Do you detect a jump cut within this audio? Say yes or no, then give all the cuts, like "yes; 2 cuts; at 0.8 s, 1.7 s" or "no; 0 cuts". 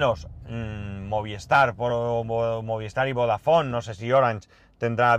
no; 0 cuts